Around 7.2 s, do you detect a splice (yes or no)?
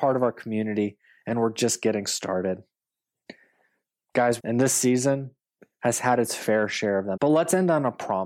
yes